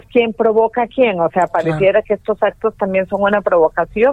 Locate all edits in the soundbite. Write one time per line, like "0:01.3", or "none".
none